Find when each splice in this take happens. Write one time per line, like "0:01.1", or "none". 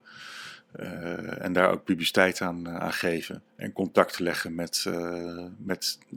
0:03.5